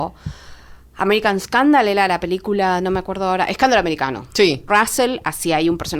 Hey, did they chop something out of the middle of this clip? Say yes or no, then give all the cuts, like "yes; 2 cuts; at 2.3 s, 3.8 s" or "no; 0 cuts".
yes; 1 cut; at 4.7 s